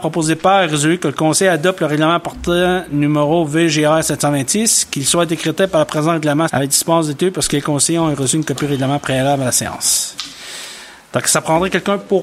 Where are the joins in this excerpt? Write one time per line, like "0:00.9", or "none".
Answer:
0:06.5